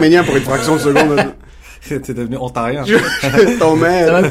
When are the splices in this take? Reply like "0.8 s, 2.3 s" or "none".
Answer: none